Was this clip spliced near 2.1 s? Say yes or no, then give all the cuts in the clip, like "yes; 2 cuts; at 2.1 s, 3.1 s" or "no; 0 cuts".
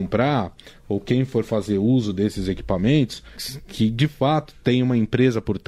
no; 1 cut; at 3.4 s